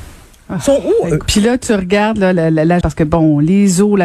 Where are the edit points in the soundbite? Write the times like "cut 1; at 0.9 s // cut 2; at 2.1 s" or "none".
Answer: cut 1; at 1.3 s // cut 2; at 2.8 s